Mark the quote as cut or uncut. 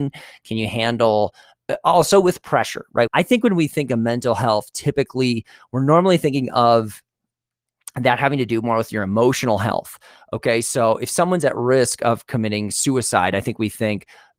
cut